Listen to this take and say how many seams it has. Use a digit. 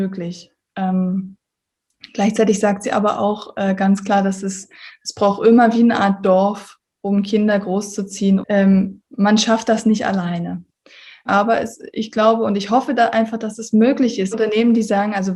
3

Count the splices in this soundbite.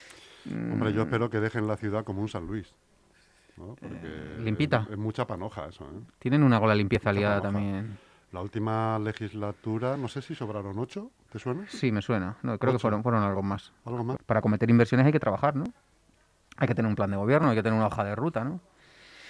1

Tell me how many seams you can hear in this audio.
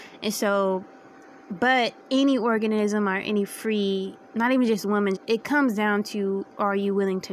2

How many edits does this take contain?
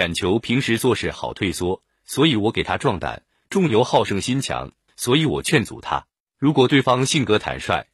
2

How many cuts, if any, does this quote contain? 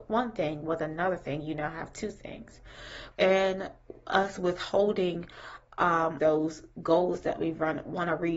2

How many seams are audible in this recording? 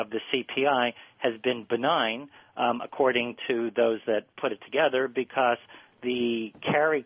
0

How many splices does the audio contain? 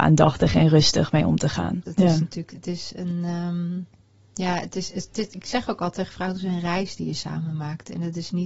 1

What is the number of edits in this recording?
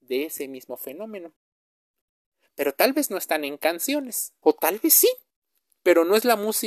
1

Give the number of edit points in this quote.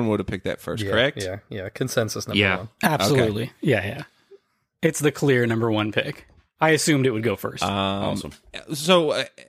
0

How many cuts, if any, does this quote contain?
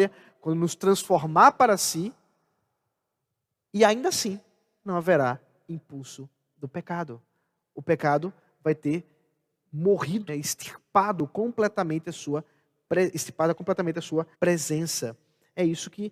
2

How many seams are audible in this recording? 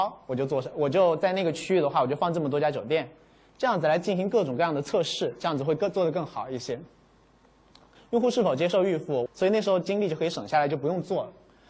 2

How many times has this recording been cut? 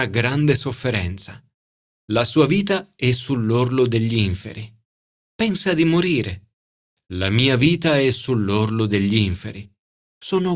0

